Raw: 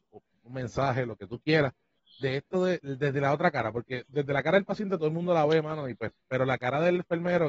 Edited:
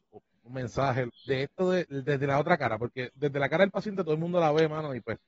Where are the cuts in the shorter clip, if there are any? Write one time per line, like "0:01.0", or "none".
0:01.1

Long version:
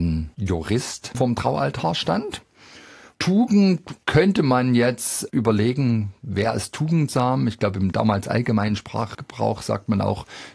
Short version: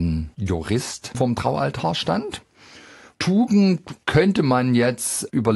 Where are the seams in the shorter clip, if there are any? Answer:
none

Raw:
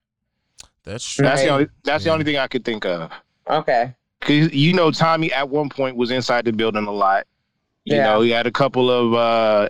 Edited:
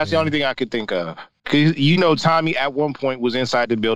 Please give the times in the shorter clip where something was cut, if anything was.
0:01.4

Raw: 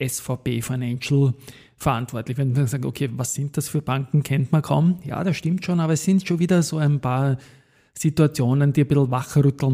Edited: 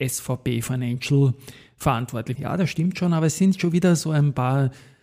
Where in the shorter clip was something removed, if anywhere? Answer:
0:02.3

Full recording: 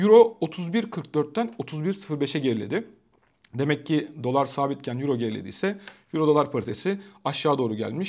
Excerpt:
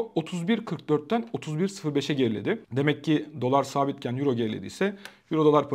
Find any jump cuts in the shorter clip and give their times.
0:02.6

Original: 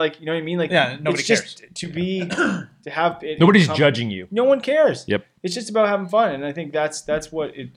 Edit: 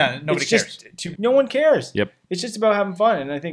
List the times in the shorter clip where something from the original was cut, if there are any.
0:01.1

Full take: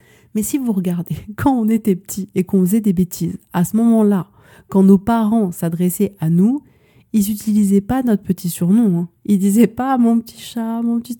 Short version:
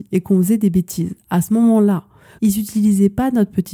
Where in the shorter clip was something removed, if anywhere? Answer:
0:02.4

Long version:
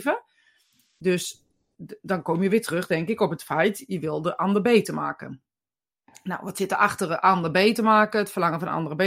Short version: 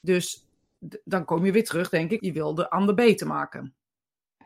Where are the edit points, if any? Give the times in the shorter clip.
0:02.2

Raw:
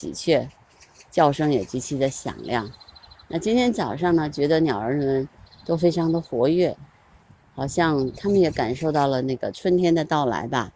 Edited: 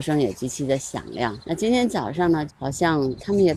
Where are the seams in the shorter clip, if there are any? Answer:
0:01.4
0:02.5

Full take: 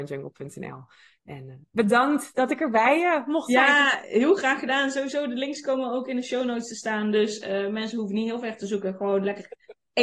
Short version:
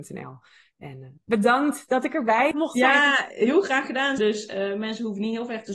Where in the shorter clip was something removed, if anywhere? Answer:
0:02.5
0:04.2

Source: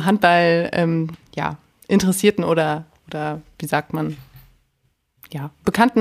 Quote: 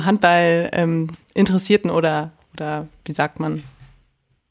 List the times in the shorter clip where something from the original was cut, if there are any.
0:01.2

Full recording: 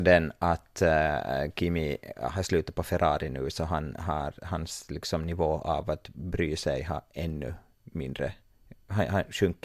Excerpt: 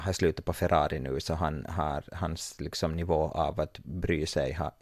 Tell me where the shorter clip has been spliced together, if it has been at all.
none

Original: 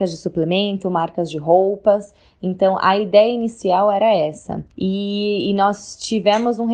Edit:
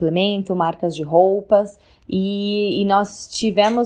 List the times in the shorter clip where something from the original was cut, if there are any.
0:02.0

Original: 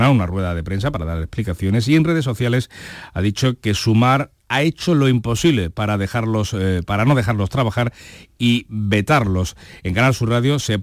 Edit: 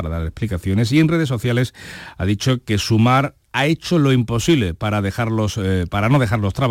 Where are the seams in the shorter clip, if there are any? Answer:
none

